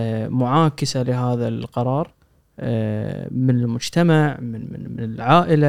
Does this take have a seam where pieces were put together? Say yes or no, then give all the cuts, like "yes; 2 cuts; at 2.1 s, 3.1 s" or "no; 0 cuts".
no; 0 cuts